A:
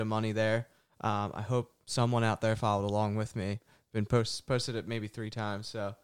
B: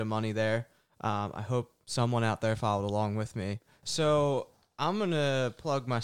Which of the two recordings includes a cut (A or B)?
B